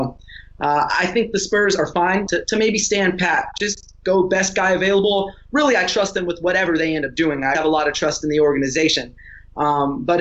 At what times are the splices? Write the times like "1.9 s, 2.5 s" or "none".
2.3 s, 7.5 s